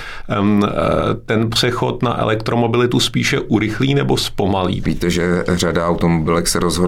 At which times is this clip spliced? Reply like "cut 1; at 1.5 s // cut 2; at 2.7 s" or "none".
cut 1; at 4.8 s